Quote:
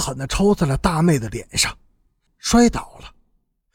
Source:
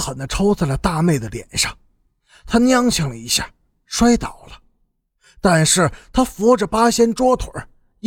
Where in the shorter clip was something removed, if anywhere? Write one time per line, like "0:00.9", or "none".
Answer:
0:02.3

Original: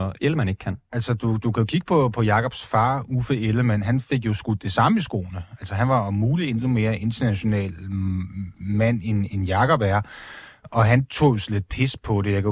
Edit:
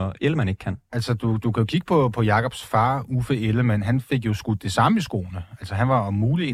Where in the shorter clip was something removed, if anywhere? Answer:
none

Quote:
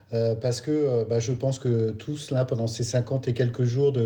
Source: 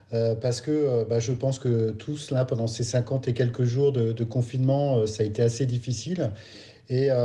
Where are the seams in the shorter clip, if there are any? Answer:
none

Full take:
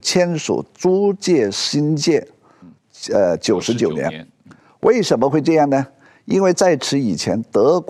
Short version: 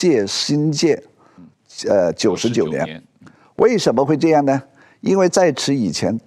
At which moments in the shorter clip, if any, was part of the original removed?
none

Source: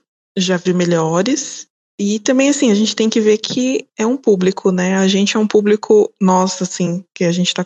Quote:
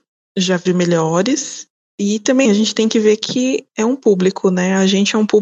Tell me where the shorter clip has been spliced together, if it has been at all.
0:02.5

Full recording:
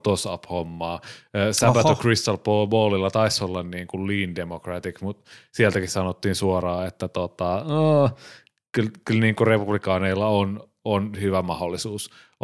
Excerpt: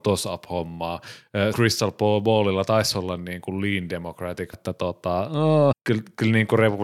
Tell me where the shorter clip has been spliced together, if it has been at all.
0:01.5
0:04.5
0:05.7

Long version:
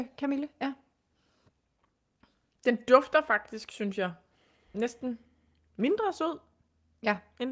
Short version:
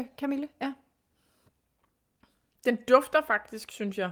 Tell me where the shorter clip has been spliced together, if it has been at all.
none

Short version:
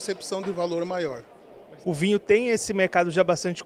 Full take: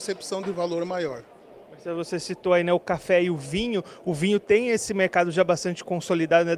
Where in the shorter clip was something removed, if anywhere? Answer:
0:01.8

